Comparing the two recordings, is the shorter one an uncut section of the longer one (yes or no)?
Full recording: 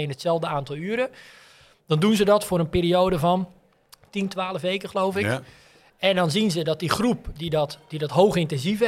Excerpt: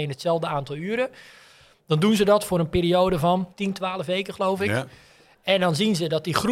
no